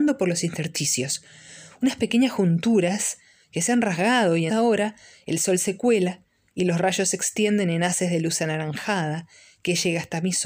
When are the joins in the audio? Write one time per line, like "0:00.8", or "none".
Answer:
0:04.5

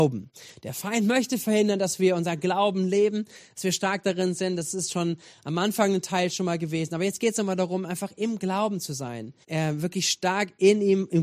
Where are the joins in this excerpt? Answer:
0:09.4

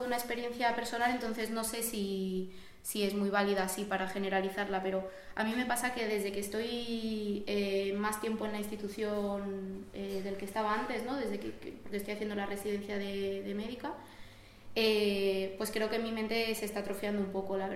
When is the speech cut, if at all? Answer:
none

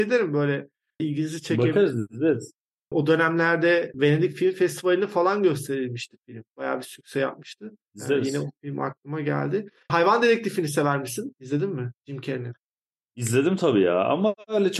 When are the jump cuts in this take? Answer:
none

